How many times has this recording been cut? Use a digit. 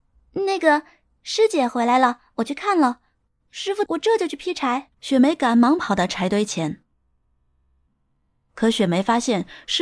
2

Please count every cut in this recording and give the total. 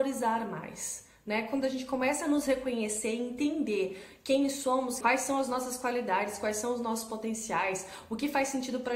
1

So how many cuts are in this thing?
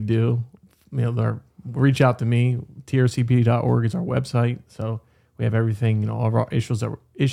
0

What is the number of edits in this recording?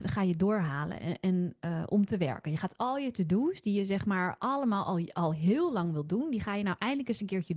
0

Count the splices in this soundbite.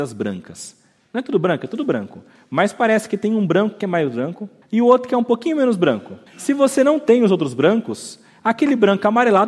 2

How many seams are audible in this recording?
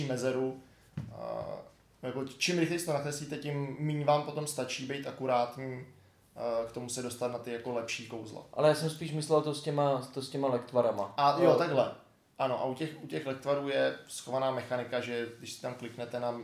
0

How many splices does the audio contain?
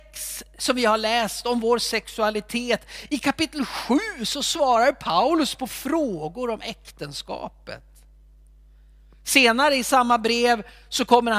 0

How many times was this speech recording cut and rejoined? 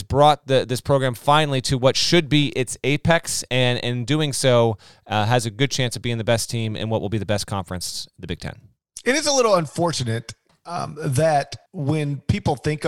1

